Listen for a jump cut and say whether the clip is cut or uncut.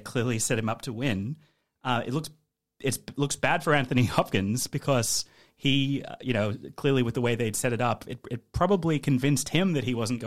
uncut